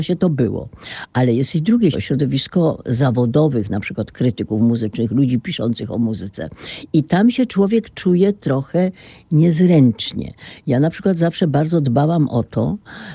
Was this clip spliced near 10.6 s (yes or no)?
no